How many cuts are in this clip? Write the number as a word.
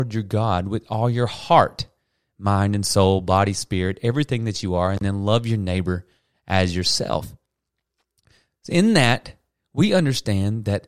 zero